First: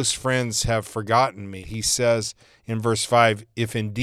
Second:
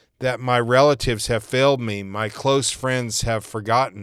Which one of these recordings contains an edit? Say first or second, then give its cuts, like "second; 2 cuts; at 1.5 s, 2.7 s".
first; 1 cut; at 1.6 s